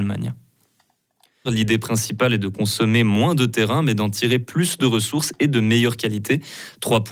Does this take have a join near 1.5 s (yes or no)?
yes